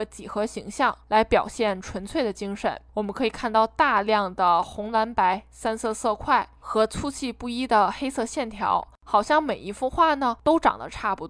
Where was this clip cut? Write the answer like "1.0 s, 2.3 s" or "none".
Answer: 2.9 s